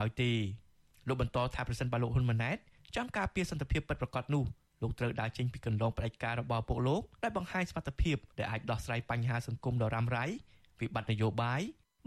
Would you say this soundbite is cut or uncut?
cut